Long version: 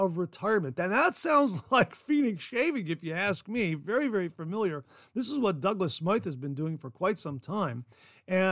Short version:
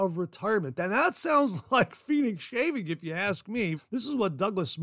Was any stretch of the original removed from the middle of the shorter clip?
yes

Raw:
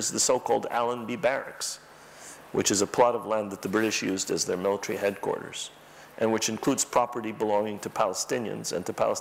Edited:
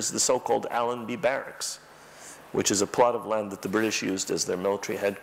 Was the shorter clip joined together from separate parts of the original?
no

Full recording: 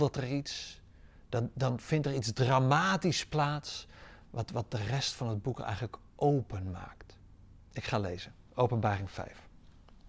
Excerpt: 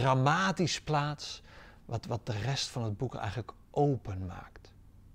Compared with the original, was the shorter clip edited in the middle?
no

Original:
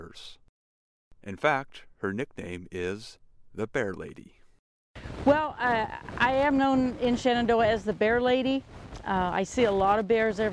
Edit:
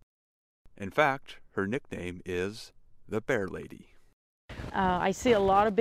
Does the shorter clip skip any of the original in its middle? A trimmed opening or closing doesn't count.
yes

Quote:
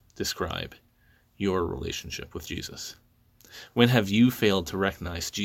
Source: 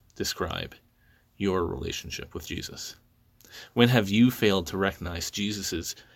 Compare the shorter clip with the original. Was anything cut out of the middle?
no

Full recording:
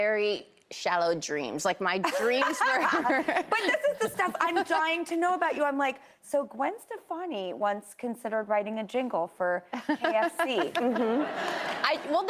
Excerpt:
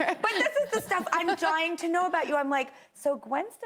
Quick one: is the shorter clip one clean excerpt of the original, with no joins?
yes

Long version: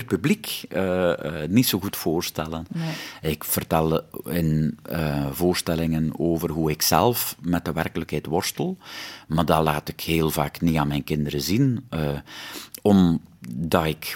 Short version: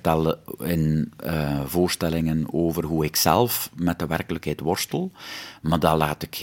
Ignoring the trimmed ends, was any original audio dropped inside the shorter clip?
no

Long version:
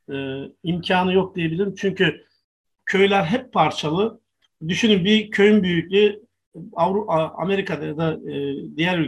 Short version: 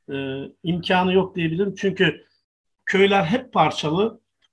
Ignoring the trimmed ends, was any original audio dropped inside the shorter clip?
no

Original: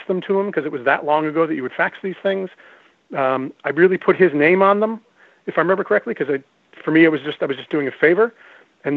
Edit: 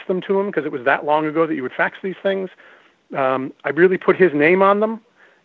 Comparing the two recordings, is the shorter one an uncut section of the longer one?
yes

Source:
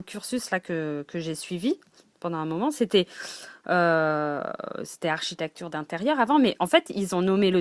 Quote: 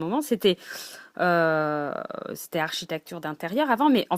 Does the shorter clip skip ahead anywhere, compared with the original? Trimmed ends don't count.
no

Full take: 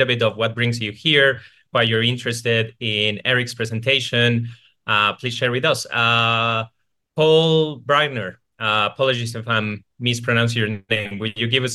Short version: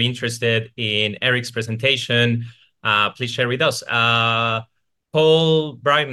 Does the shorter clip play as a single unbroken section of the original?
yes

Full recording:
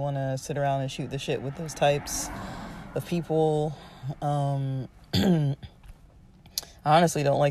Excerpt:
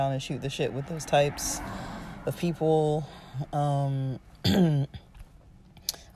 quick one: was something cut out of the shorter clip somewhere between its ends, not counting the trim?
no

